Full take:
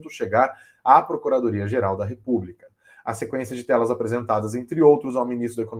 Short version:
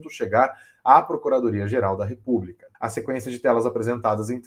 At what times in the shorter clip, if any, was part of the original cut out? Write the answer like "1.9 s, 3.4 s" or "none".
2.7 s